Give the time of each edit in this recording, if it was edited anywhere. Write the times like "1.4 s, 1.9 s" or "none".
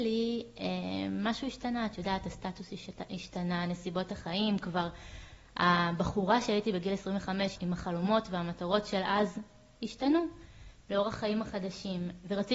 7.6 s